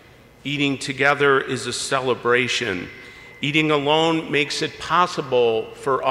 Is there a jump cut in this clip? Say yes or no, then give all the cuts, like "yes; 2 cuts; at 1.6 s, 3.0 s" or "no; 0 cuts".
no; 0 cuts